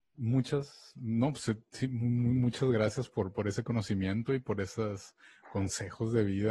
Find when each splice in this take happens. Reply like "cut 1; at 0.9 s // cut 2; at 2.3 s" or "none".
none

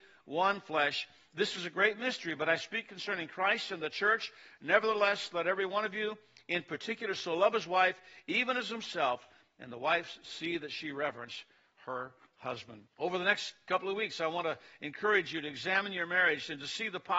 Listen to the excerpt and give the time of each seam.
cut 1; at 12.9 s

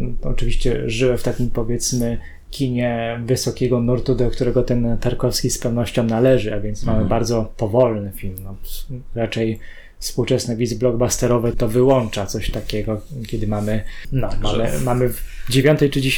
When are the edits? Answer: cut 1; at 11.5 s // cut 2; at 14.0 s

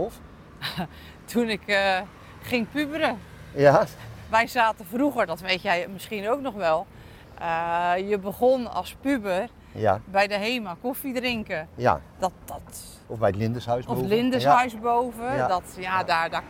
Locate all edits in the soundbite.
none

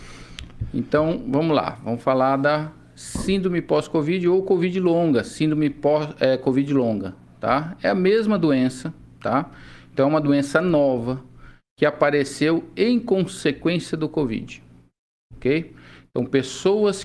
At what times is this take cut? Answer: none

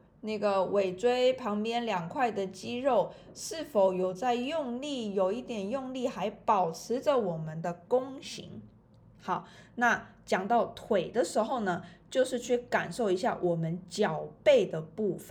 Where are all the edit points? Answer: none

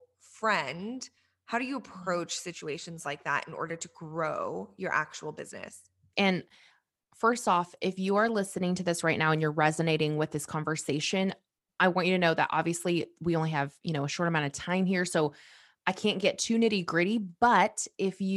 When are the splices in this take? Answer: cut 1; at 6.1 s

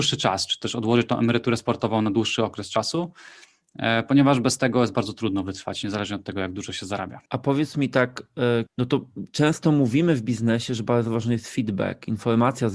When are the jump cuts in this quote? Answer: cut 1; at 7.3 s // cut 2; at 8.7 s

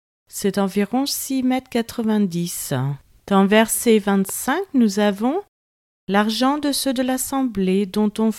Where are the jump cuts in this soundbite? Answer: cut 1; at 3.2 s

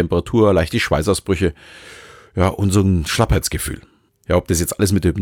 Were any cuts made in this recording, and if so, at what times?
cut 1; at 4.1 s

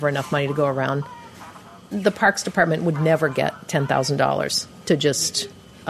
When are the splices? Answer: none

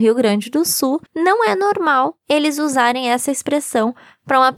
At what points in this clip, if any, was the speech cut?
cut 1; at 1.1 s

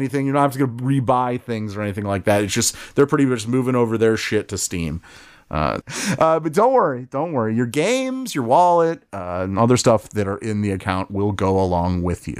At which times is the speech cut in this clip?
cut 1; at 5.8 s

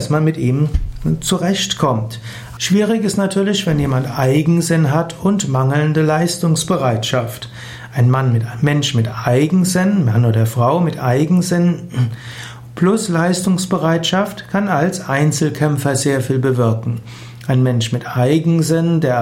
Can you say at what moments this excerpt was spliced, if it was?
cut 1; at 2.6 s

